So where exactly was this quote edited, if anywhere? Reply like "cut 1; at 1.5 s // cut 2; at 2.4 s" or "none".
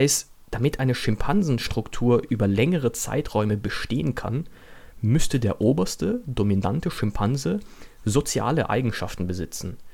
none